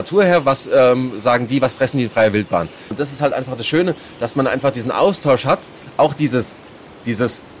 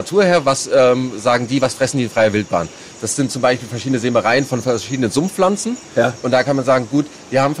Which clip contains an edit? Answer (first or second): first